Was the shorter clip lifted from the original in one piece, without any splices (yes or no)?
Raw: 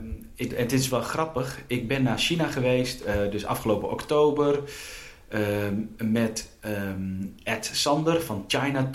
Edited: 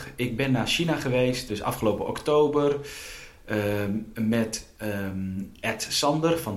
no